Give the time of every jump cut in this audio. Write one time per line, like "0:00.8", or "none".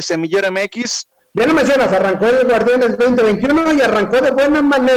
none